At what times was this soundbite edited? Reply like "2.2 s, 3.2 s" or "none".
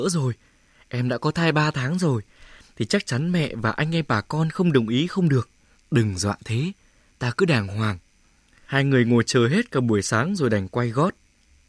5.7 s, 8.7 s